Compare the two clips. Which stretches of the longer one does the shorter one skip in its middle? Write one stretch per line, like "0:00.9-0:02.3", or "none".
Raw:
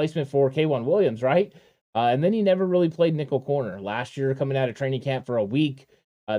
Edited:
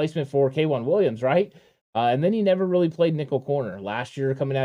none